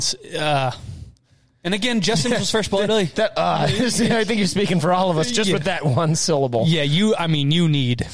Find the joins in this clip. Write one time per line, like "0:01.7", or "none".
none